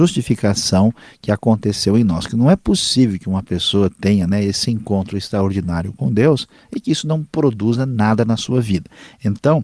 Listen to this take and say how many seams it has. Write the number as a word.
zero